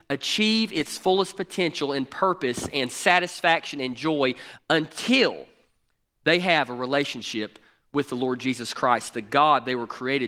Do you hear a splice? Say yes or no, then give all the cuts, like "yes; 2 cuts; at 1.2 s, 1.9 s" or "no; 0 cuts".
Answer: no; 0 cuts